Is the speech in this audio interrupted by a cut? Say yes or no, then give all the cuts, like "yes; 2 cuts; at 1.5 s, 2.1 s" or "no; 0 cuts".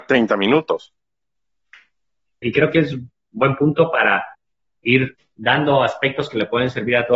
yes; 2 cuts; at 2.4 s, 5.3 s